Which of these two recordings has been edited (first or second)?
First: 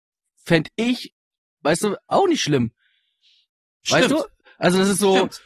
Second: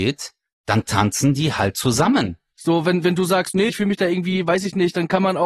second